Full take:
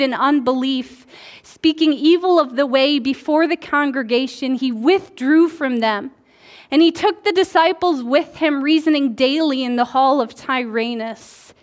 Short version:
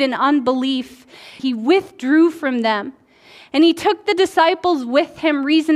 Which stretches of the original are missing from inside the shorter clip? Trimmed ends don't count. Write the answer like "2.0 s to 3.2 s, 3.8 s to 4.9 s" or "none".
1.4 s to 4.6 s